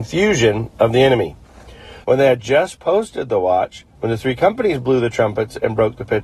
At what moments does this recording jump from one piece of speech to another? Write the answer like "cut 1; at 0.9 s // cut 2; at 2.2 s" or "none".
cut 1; at 2.0 s // cut 2; at 3.9 s